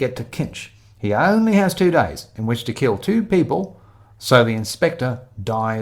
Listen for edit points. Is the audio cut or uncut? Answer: uncut